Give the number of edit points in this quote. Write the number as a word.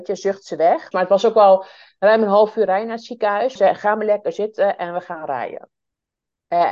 two